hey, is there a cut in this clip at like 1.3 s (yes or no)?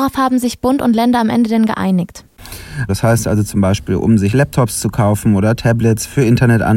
no